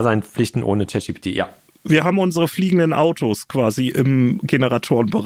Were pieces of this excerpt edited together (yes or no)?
no